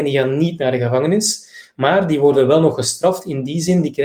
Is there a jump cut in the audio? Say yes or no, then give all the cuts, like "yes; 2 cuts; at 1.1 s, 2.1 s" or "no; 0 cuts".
no; 0 cuts